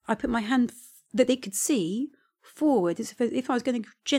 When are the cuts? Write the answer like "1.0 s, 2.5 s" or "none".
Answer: none